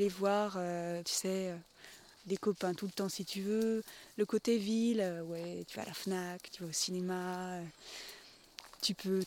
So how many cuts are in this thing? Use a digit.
1